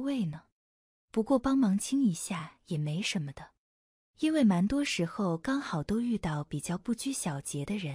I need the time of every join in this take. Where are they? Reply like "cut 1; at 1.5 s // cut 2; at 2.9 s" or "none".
none